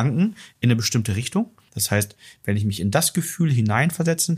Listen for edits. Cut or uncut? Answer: cut